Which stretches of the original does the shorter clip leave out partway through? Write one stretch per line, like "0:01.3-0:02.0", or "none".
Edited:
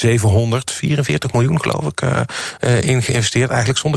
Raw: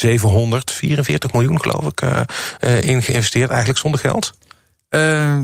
none